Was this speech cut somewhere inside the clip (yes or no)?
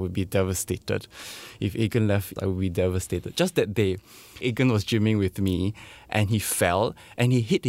yes